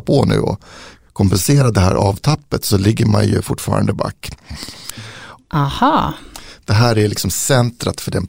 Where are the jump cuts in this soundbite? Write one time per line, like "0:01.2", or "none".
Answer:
0:05.4